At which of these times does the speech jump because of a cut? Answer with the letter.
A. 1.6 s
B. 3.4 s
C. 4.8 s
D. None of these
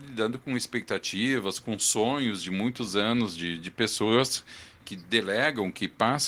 C